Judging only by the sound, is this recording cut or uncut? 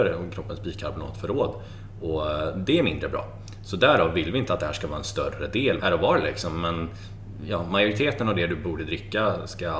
cut